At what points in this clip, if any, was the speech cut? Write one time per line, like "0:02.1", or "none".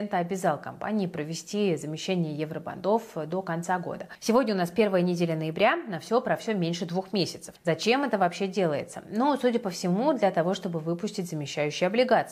0:07.6